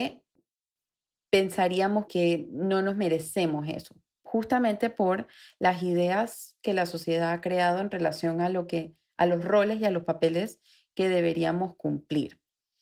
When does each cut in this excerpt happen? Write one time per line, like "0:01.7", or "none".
0:02.1